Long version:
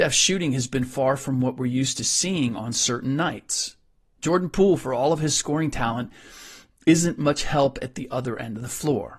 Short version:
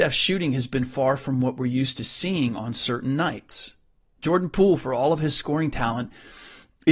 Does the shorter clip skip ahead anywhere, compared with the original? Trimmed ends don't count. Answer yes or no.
no